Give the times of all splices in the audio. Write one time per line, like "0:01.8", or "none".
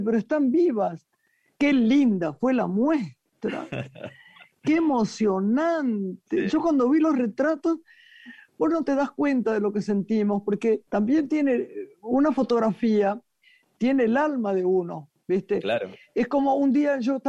0:01.5
0:10.9